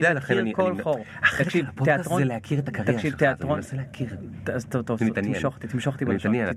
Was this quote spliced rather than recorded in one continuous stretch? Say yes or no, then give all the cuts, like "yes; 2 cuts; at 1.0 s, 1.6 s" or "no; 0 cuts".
no; 0 cuts